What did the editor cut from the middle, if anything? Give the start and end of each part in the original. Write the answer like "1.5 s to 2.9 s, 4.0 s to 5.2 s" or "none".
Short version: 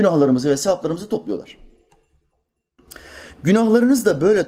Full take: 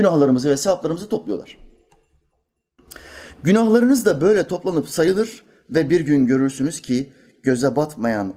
none